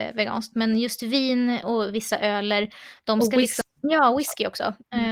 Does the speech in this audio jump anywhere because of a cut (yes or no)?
yes